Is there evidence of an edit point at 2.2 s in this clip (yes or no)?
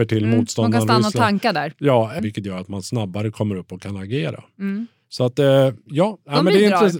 yes